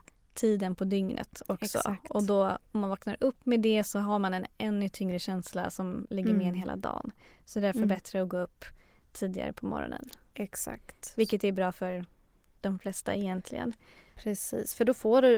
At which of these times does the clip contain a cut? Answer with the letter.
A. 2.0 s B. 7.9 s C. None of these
C